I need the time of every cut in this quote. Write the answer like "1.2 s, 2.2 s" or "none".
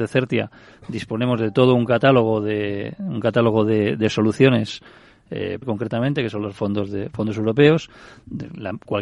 5.6 s

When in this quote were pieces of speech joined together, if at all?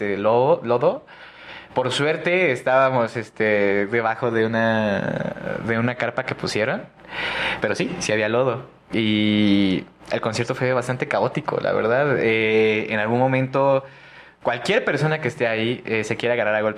none

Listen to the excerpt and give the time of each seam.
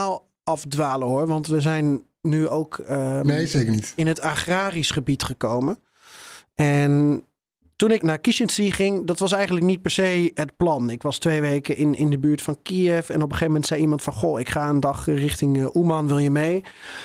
8.0 s

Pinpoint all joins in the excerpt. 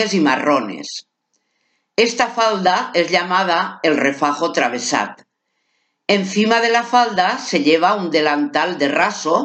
none

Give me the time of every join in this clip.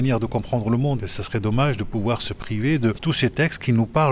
1.0 s

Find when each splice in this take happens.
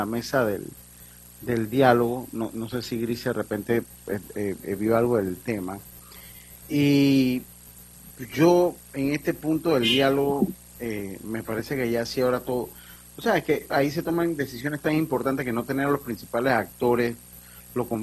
6.7 s, 13.7 s

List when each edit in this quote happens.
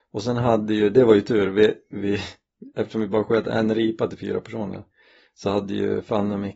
none

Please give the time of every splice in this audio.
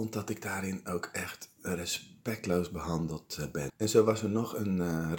3.7 s

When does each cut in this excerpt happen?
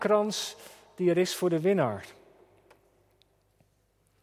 none

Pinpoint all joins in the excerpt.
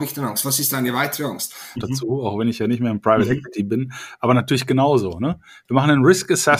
1.7 s

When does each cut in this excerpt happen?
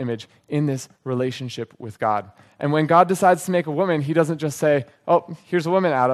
none

